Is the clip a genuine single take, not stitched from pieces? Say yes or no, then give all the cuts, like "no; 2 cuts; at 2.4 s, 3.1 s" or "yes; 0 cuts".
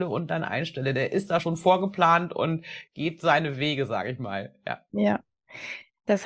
yes; 0 cuts